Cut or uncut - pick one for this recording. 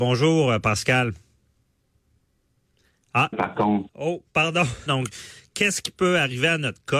cut